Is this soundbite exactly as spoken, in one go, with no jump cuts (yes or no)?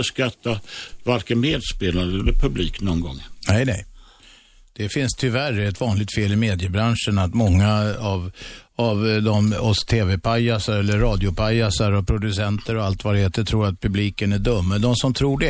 yes